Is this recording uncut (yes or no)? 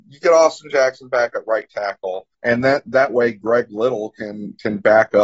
no